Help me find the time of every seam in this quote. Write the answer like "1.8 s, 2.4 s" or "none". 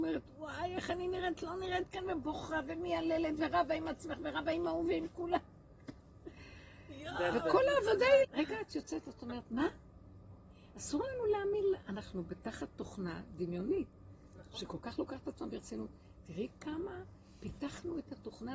8.2 s